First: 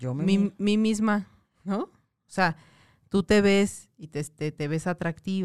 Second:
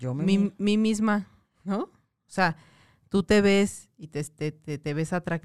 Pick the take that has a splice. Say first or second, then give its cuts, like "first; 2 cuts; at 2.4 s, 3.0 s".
first; 1 cut; at 4.5 s